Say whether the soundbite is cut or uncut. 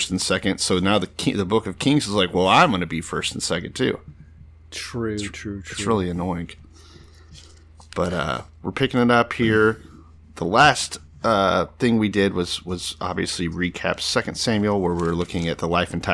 uncut